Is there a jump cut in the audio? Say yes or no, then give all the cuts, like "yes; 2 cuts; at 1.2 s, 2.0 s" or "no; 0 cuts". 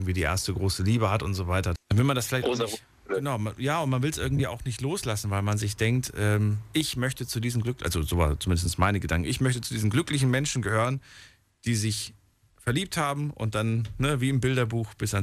yes; 1 cut; at 1.8 s